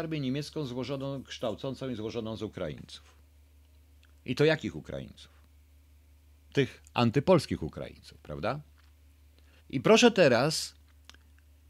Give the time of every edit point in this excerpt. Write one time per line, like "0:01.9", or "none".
0:09.6

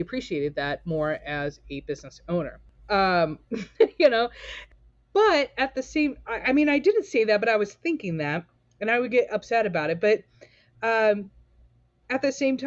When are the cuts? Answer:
0:02.8

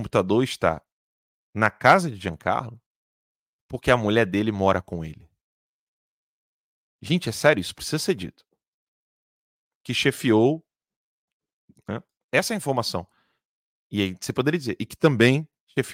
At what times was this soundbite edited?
0:09.8
0:12.2

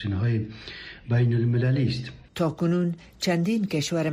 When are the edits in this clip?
0:02.3

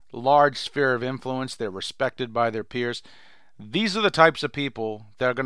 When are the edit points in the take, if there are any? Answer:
none

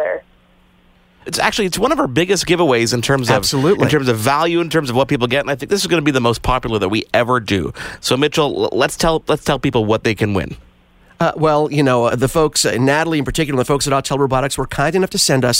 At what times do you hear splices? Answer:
0:01.3
0:12.1

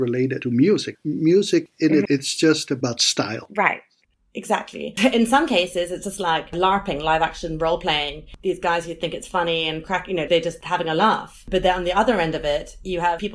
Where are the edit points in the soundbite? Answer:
0:02.1
0:05.0

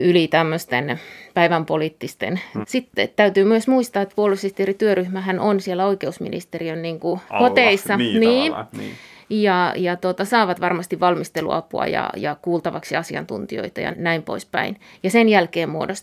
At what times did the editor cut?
0:02.6
0:07.3
0:13.9

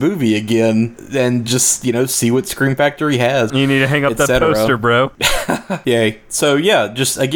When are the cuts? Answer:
0:03.5
0:05.8

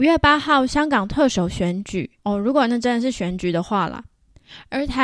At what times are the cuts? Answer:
0:02.2

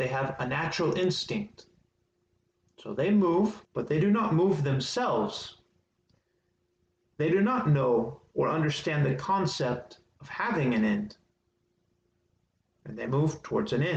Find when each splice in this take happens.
0:03.6
0:12.6

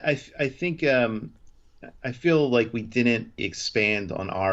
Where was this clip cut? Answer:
0:03.4

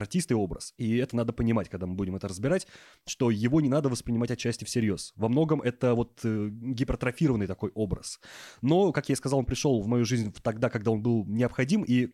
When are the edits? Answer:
none

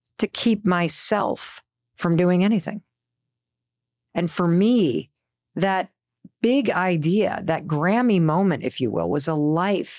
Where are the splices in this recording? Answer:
none

